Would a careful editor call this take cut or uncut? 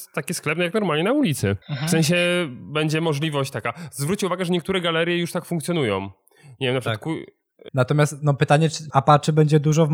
cut